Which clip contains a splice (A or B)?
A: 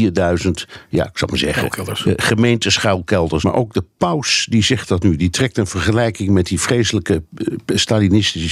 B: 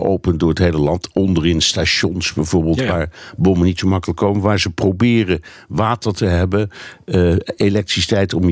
A